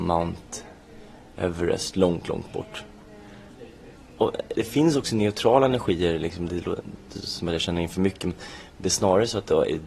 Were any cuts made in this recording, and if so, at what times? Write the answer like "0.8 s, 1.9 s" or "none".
none